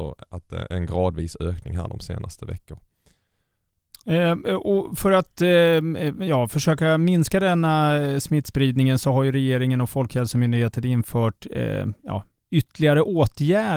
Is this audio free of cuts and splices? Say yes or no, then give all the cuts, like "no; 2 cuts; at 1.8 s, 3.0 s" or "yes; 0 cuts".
yes; 0 cuts